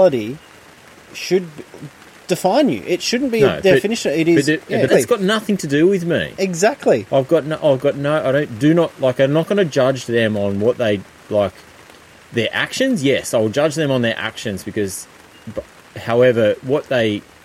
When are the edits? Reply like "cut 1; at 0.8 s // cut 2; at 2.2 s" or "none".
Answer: cut 1; at 4.9 s